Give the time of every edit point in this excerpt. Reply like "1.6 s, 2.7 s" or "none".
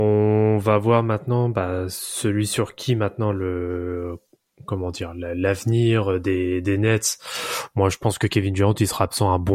none